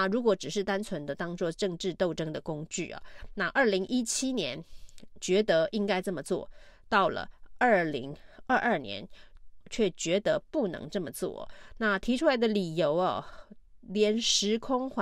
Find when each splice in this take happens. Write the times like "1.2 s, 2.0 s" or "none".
9.6 s